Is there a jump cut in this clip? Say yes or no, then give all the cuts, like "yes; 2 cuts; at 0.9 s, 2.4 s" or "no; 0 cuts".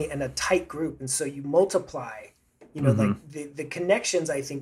no; 0 cuts